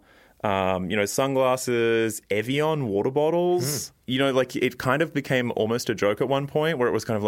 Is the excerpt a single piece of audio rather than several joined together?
yes; 0 cuts

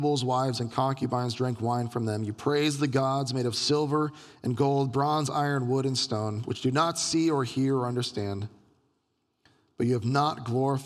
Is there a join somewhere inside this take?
no; 0 cuts

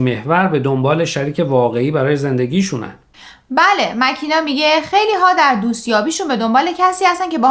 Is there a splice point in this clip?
no; 0 cuts

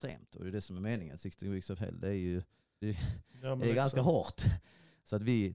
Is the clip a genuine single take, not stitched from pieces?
no; 1 cut; at 2.8 s

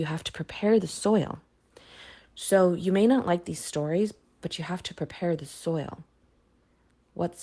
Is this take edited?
no; 0 cuts

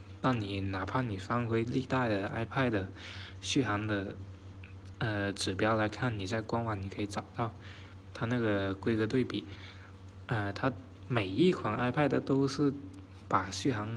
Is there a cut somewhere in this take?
no; 0 cuts

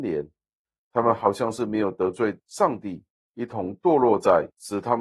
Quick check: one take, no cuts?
no; 1 cut; at 3.3 s

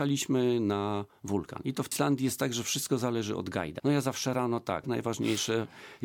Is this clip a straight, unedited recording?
no; 2 cuts; at 3.8 s, 4.8 s

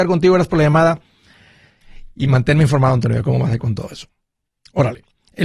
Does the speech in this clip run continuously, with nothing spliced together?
yes; 0 cuts

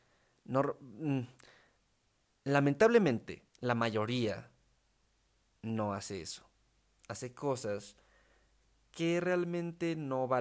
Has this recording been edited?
yes; 1 cut; at 3.5 s

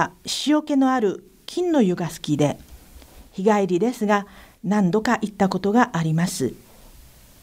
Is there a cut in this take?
no; 0 cuts

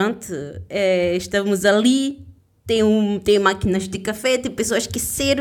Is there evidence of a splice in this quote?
no; 0 cuts

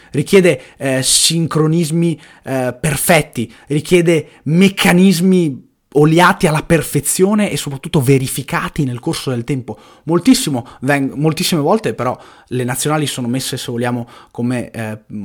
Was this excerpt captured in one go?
yes; 0 cuts

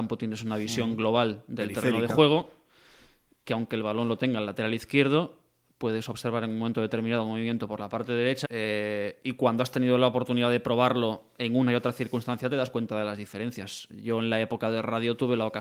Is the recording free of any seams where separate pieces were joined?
no; 1 cut; at 8.4 s

